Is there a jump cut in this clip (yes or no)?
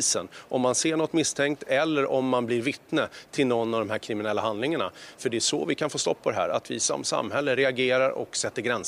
no